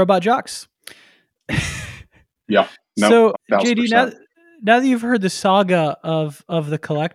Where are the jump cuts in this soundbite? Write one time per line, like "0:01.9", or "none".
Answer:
0:03.3